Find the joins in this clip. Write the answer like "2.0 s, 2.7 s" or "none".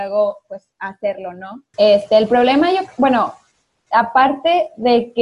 1.7 s